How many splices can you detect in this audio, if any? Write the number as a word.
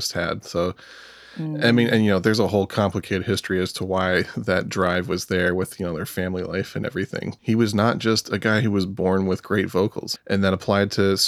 two